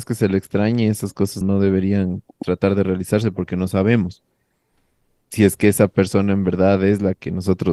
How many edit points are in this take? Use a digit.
1